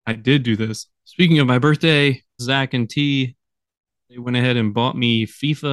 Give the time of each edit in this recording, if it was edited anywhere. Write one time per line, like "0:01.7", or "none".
0:01.0
0:02.4